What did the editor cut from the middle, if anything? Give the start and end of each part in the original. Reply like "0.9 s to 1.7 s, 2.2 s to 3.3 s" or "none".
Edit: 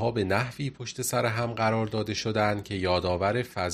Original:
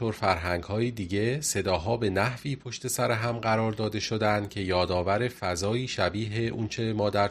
none